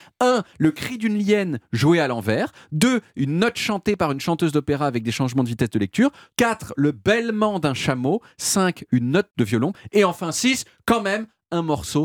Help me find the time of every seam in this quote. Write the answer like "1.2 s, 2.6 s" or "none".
6.3 s